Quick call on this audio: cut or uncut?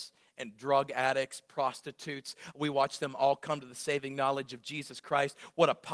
uncut